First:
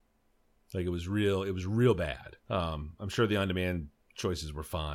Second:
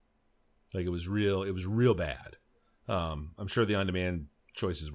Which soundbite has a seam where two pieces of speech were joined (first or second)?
first